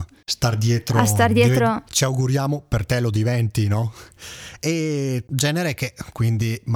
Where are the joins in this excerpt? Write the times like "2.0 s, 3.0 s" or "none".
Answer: 1.9 s